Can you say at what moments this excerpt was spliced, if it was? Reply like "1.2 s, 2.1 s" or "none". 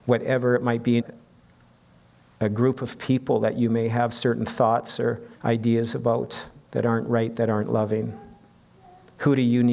1.0 s, 5.3 s